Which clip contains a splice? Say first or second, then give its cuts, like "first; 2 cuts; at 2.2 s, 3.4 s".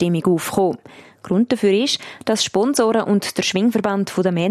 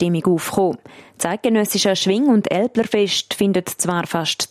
first; 1 cut; at 1.0 s